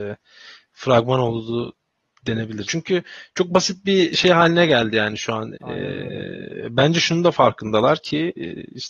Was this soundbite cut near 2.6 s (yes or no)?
yes